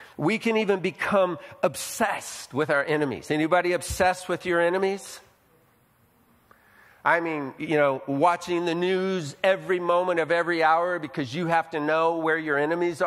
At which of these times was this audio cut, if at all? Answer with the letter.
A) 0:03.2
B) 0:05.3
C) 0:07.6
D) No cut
C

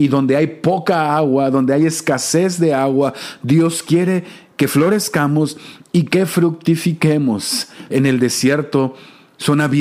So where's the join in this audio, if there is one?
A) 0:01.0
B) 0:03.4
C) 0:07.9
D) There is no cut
C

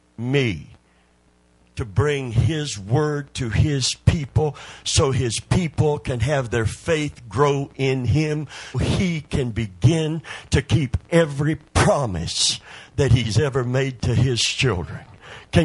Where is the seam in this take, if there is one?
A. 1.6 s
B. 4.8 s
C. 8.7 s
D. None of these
C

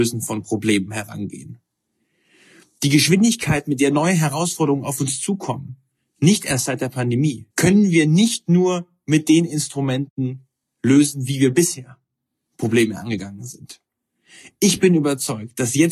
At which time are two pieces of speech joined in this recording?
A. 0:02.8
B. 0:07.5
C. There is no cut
B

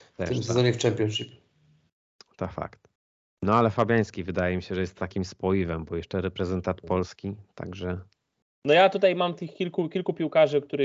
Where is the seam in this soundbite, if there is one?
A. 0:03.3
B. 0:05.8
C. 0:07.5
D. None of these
D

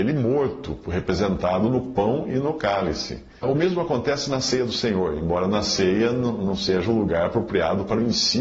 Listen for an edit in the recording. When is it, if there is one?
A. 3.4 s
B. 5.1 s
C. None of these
A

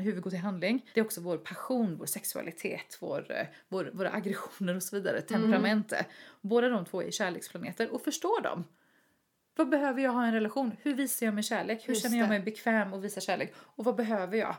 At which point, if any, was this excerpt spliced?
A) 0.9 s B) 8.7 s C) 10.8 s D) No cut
A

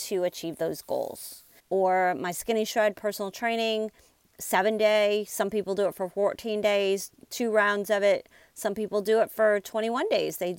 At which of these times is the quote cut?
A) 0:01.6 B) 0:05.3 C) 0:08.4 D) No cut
A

